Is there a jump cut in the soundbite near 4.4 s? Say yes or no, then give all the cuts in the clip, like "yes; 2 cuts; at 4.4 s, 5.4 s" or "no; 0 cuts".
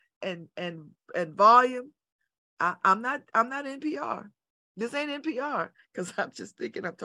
no; 1 cut; at 5.7 s